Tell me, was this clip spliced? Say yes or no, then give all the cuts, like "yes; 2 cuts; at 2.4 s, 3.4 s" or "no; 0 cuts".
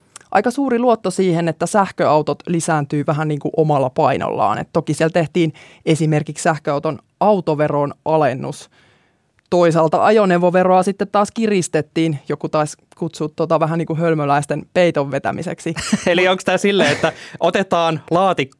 no; 0 cuts